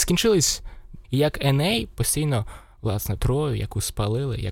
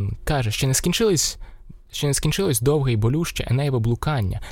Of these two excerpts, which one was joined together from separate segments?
first; 2 cuts; at 1.0 s, 3.2 s

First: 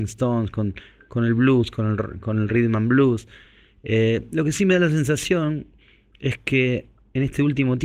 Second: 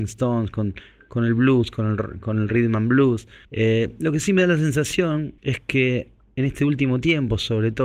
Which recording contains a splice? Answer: second; 2 cuts; at 3.4 s, 5.4 s

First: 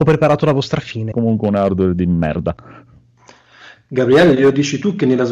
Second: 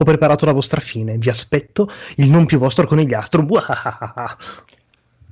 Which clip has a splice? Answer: first; 1 cut; at 1.1 s

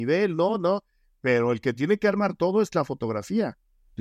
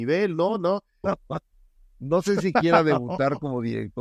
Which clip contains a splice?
second; 1 cut; at 1.0 s

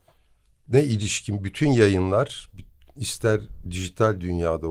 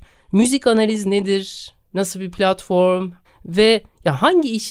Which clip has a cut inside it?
second; 1 cut; at 3.2 s

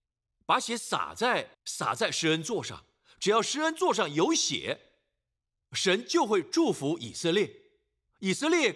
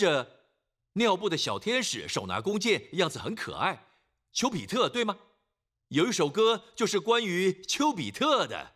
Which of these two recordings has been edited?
first; 1 cut; at 1.5 s

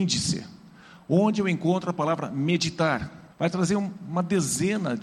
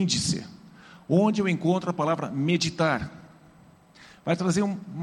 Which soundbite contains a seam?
first; 1 cut; at 3.3 s

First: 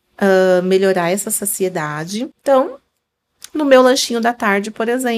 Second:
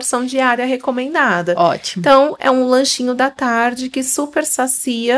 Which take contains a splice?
first; 1 cut; at 2.3 s

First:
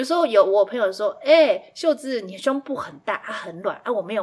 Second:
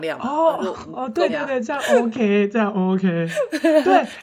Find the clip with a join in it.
second; 1 cut; at 1.3 s

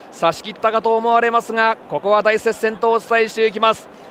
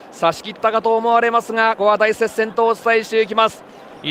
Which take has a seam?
second; 1 cut; at 1.8 s

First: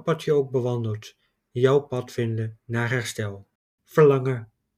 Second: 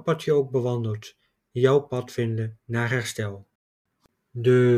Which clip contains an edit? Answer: first; 1 cut; at 3.8 s

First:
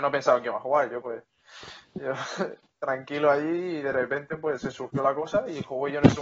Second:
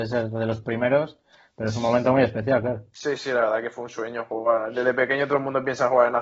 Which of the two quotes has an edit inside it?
first; 1 cut; at 1.0 s

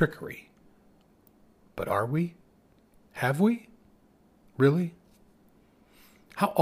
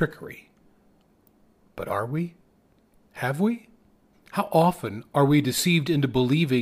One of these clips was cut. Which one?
second; 1 cut; at 4.1 s

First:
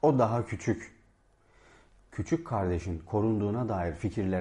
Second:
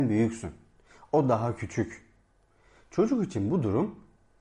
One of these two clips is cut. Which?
second; 1 cut; at 2.8 s

